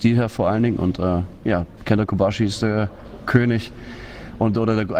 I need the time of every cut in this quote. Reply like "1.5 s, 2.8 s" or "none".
1.8 s